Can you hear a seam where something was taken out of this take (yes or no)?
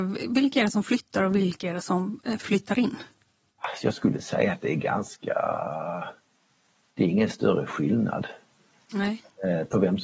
no